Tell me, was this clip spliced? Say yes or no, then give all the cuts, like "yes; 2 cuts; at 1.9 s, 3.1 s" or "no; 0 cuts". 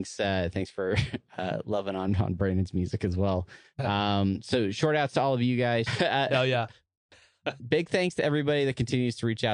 yes; 2 cuts; at 5.9 s, 7.6 s